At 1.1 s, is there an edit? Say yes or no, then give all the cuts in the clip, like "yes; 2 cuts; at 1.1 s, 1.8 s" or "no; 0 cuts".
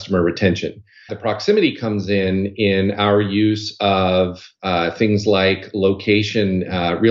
yes; 1 cut; at 1.1 s